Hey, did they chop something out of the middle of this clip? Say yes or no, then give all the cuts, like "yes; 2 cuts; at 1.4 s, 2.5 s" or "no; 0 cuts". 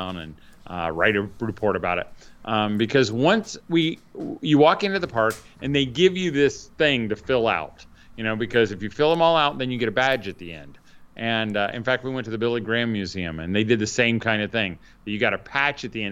no; 0 cuts